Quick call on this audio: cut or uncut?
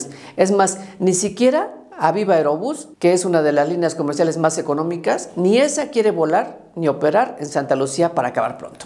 cut